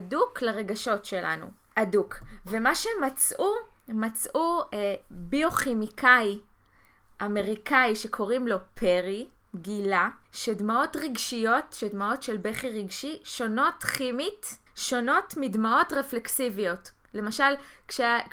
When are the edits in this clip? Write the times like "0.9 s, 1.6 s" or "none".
1.7 s, 10.2 s, 14.7 s